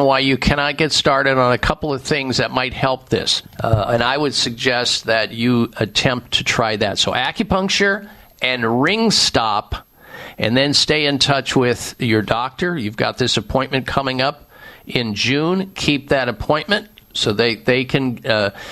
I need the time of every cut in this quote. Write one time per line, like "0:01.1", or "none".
0:03.4